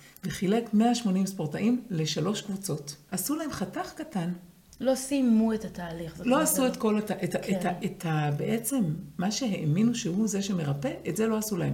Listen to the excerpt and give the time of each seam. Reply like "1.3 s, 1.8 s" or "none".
3.1 s, 4.7 s